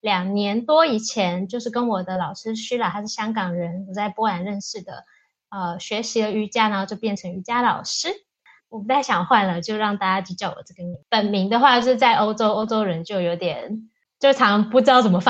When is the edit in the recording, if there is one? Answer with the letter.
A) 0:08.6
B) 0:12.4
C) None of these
A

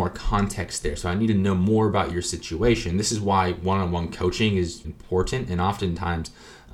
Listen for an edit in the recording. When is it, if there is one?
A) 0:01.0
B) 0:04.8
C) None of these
B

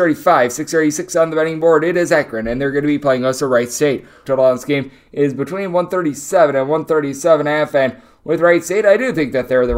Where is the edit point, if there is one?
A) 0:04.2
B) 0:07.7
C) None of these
A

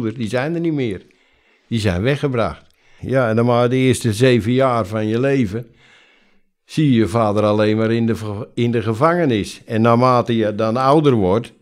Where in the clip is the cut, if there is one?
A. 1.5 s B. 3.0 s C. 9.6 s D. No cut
B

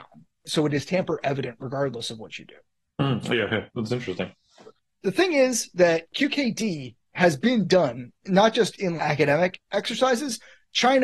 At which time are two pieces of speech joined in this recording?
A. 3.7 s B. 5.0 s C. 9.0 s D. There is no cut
C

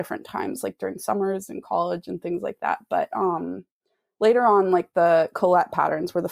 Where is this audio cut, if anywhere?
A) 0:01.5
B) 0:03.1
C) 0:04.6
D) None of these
D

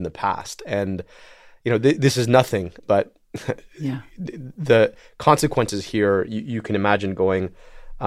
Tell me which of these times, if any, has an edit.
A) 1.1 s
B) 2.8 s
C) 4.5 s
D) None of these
B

